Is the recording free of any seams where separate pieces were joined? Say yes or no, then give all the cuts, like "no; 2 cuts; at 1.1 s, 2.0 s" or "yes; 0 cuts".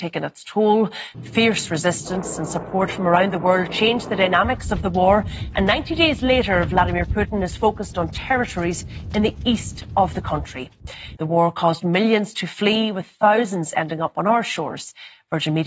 no; 2 cuts; at 1.1 s, 11.2 s